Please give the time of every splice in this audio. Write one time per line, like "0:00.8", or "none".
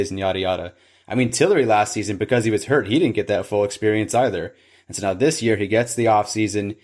none